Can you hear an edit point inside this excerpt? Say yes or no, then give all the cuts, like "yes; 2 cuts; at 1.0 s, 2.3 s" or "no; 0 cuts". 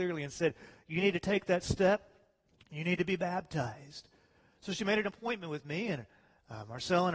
no; 0 cuts